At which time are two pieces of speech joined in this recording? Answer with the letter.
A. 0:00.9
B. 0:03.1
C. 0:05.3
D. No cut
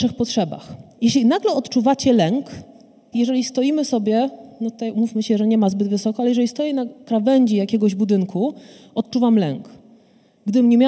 B